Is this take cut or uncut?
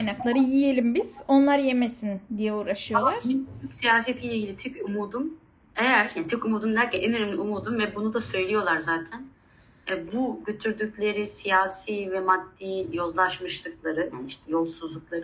cut